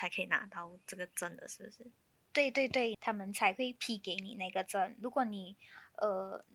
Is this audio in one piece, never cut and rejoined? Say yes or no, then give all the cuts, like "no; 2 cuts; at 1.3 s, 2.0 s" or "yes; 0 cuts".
no; 1 cut; at 2.9 s